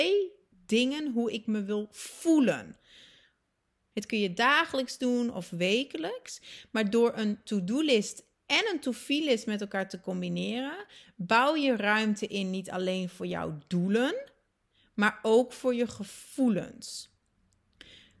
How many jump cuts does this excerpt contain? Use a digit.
1